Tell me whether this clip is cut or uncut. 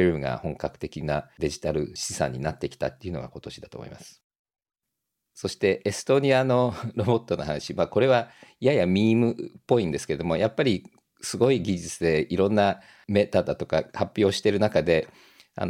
uncut